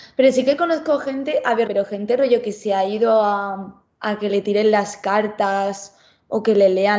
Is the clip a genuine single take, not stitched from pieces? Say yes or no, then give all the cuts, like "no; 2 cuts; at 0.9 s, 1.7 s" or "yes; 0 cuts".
no; 1 cut; at 1.7 s